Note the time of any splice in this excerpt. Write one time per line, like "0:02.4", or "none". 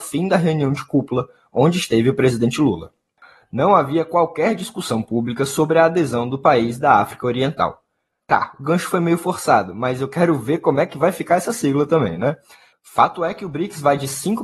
0:08.2
0:12.7